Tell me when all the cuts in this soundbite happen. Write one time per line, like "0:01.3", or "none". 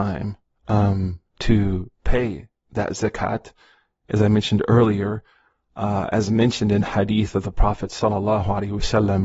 none

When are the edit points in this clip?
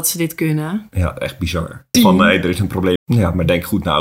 0:01.9
0:03.0

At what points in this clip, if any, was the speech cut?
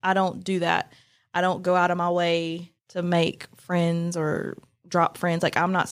0:02.8

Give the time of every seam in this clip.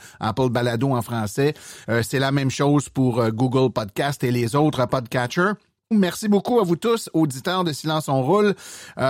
0:01.8
0:05.9

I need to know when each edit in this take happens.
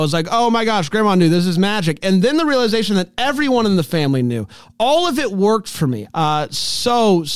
0:06.1

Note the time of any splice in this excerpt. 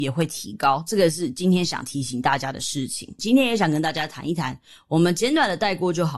0:03.2

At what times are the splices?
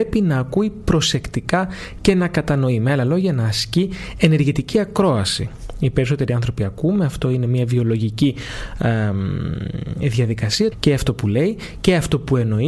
0:10.7

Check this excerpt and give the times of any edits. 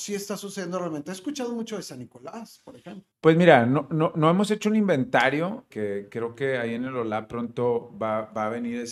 0:03.1
0:05.7

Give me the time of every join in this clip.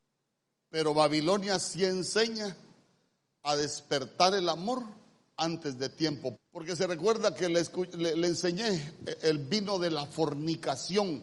0:06.4

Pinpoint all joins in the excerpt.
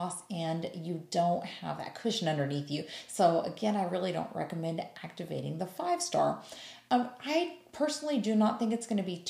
0:06.9

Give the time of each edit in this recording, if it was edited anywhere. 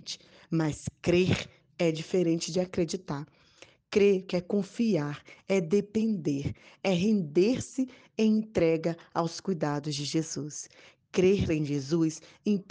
0:04.3

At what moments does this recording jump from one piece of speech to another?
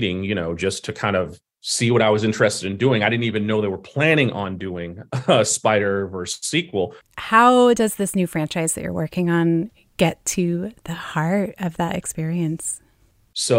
0:07.0

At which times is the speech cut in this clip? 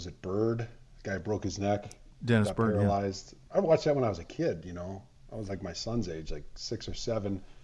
0:03.5

